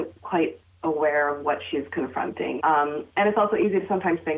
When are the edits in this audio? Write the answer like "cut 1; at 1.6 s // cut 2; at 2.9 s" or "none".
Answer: cut 1; at 2.6 s